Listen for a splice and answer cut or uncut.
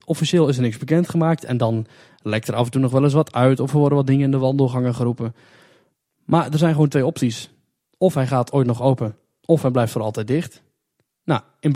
uncut